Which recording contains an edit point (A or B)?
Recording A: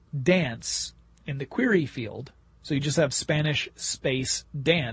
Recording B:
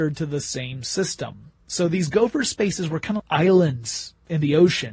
B